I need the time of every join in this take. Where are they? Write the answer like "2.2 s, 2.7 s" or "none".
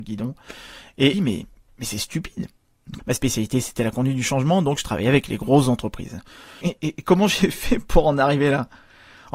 1.1 s, 3.0 s, 6.6 s